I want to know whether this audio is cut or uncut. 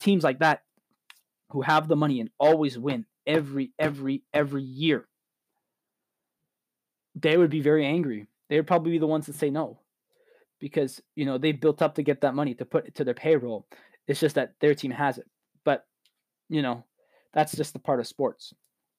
uncut